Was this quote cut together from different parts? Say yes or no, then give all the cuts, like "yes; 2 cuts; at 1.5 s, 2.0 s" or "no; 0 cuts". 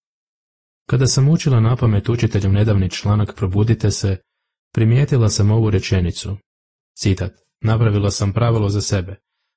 yes; 1 cut; at 7.6 s